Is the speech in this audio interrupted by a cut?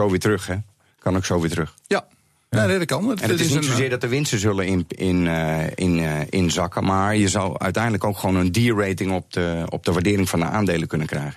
no; 0 cuts

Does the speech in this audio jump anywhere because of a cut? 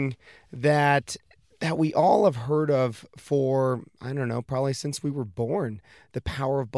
no; 0 cuts

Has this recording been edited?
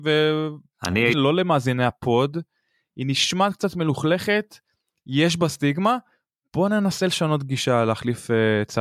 yes; 1 cut; at 1.1 s

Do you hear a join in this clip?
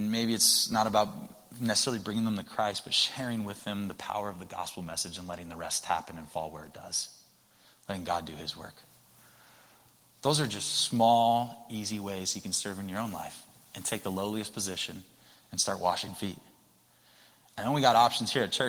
no; 0 cuts

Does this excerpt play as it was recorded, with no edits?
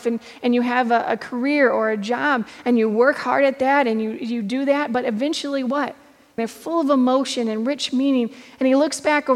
no; 1 cut; at 6.4 s

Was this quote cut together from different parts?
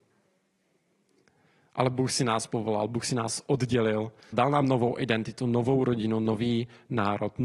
yes; 1 cut; at 4.3 s

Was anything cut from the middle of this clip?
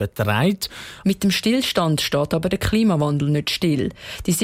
yes; 1 cut; at 1.0 s

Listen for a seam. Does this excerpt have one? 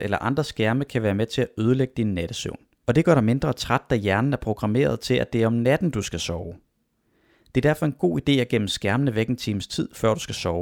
yes; 1 cut; at 2.8 s

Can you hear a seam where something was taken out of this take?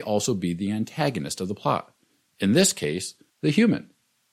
yes; 1 cut; at 3.3 s

